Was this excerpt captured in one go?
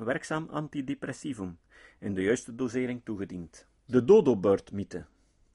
no; 1 cut; at 3.8 s

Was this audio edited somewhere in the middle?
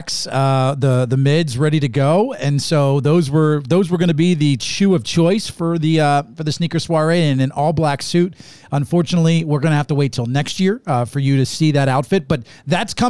no; 0 cuts

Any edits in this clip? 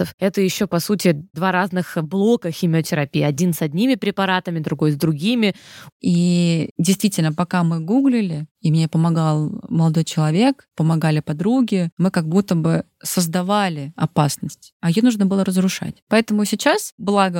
yes; 1 cut; at 5.9 s

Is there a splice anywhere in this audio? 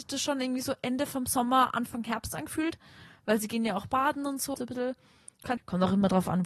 yes; 2 cuts; at 4.5 s, 5.6 s

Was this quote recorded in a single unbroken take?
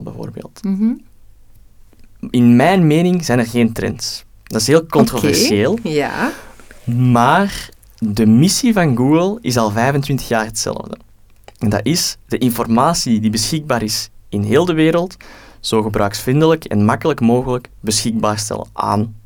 yes; 0 cuts

